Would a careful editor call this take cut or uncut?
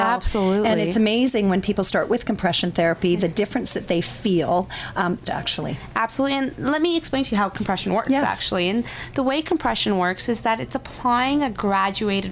cut